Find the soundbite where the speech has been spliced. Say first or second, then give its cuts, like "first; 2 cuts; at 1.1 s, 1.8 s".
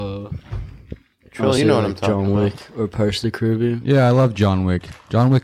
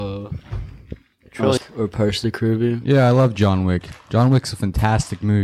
second; 1 cut; at 1.6 s